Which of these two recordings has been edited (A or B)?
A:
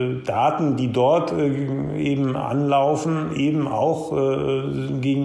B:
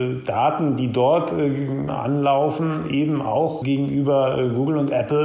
B